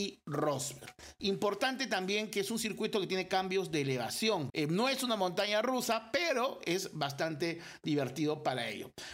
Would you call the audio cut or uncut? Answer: cut